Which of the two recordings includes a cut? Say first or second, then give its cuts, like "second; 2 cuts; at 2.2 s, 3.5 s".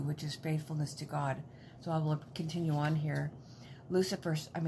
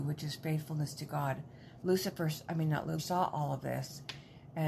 second; 2 cuts; at 1.8 s, 3.0 s